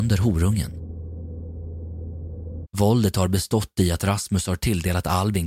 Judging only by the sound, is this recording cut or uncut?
cut